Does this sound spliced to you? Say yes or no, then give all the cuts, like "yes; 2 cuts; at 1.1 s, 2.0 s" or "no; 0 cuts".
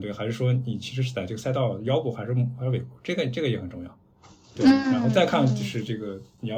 no; 0 cuts